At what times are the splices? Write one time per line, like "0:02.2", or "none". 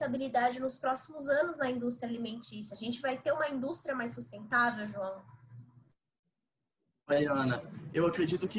none